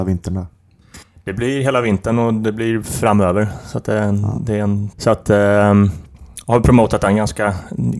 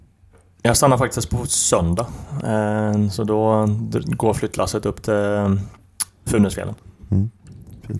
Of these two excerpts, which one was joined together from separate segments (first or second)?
first